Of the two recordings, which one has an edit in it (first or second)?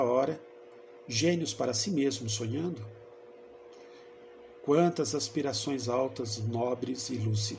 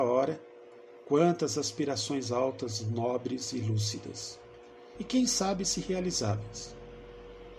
second